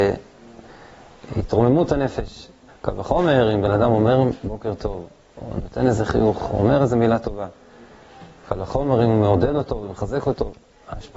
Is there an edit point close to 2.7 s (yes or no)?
yes